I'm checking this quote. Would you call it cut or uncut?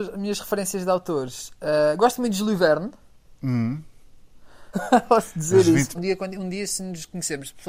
cut